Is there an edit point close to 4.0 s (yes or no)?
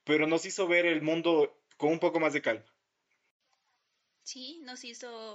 no